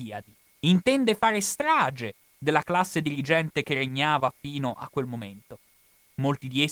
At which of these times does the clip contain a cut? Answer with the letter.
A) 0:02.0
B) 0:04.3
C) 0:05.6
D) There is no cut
D